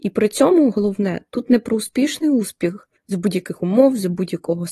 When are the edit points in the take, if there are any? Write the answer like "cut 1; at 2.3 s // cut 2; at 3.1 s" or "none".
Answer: cut 1; at 3.0 s

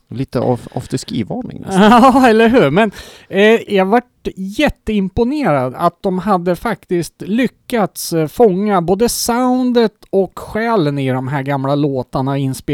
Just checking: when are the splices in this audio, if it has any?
cut 1; at 3.7 s

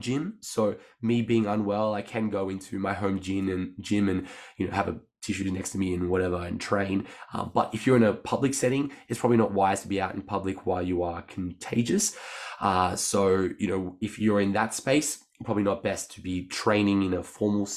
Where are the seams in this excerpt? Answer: none

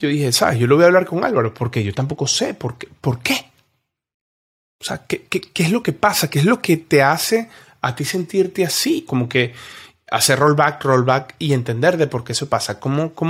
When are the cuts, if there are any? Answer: cut 1; at 9.1 s // cut 2; at 10.8 s

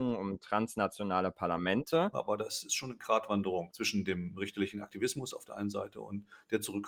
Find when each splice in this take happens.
cut 1; at 2.1 s

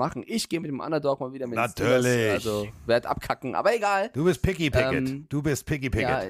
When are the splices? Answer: none

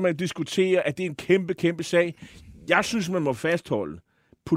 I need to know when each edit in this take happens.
none

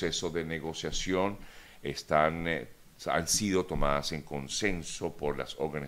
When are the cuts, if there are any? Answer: none

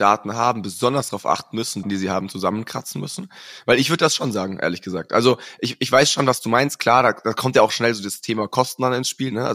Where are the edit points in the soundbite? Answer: cut 1; at 1.8 s

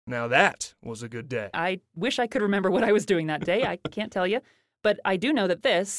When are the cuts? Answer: cut 1; at 1.5 s

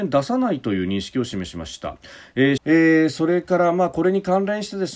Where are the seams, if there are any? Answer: cut 1; at 2.6 s

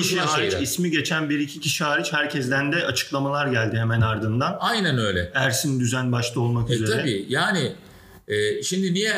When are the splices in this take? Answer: none

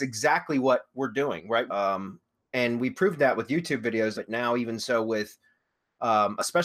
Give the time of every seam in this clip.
cut 1; at 1.7 s // cut 2; at 4.1 s

